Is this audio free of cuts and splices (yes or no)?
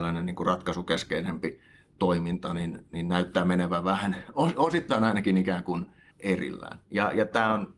no